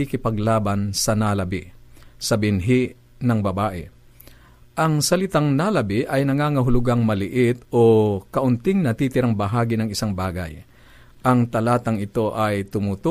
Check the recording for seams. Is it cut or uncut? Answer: uncut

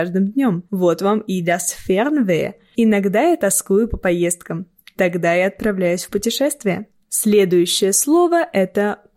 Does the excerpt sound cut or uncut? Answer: cut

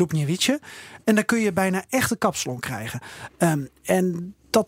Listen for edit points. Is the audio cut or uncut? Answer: cut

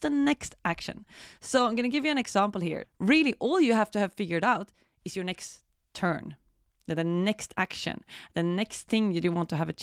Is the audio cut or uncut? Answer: cut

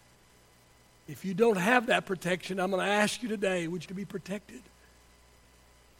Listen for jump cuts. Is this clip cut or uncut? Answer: cut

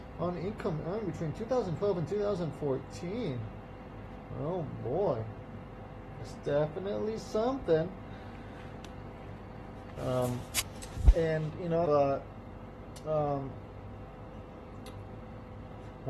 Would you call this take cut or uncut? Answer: cut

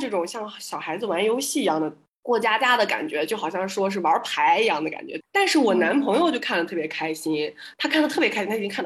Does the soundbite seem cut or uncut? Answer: cut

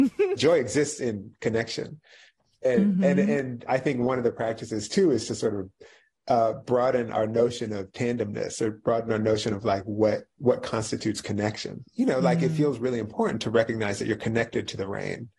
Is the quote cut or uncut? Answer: uncut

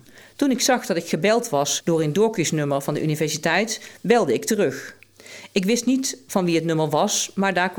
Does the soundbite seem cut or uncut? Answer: uncut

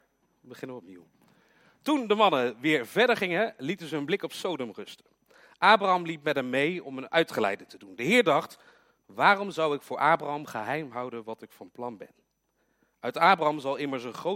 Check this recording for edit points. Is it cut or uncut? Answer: uncut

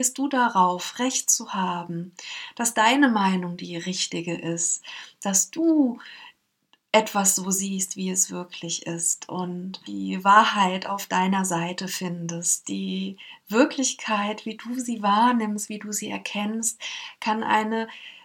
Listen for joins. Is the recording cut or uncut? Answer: cut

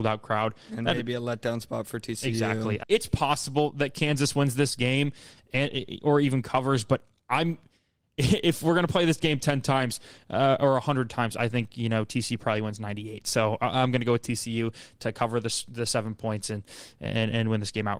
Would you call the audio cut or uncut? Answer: cut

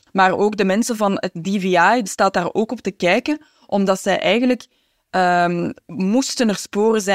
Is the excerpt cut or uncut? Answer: cut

